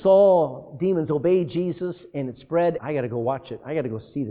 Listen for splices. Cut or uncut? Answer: cut